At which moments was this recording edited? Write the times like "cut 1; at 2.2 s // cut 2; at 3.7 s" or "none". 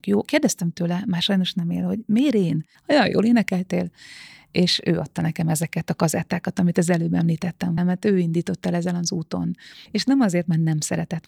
cut 1; at 2.7 s // cut 2; at 7.8 s // cut 3; at 9.9 s